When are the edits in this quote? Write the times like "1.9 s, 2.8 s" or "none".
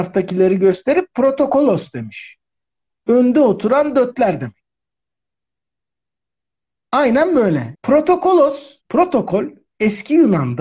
7.7 s, 8.8 s